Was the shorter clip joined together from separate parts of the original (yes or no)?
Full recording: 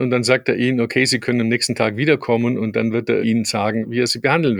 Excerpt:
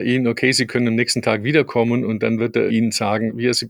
no